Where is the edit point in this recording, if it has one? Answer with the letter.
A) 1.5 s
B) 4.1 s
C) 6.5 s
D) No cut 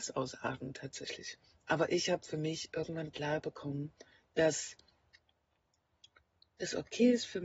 D